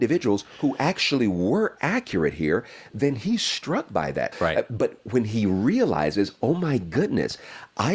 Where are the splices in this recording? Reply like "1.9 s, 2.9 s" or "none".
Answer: 4.3 s